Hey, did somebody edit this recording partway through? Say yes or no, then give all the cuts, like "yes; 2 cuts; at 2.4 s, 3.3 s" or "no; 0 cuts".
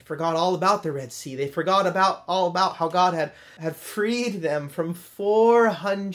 yes; 1 cut; at 3.6 s